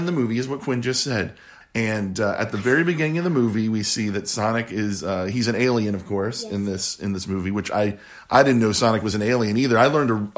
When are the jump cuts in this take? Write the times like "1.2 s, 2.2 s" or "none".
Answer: 1.6 s